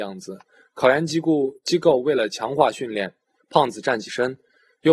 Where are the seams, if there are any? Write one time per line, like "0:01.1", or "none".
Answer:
0:03.4